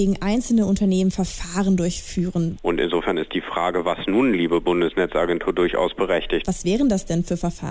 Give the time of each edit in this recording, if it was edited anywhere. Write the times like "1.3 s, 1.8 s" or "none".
2.6 s, 6.4 s